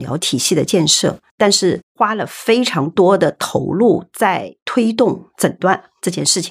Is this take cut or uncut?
cut